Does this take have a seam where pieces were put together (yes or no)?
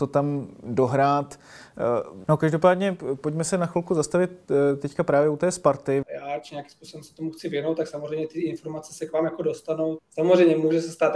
yes